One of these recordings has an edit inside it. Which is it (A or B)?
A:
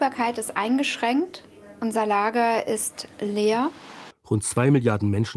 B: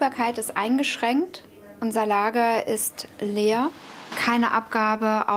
A